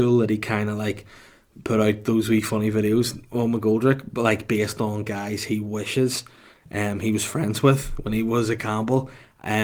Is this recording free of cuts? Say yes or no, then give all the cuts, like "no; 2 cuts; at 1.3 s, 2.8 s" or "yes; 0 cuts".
yes; 0 cuts